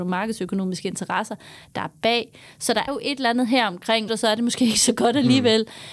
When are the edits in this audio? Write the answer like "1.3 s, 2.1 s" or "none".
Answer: 2.9 s, 4.1 s